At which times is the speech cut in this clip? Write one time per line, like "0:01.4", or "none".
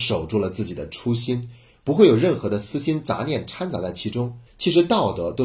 0:04.5